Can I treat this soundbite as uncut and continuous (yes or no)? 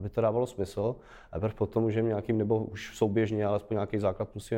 yes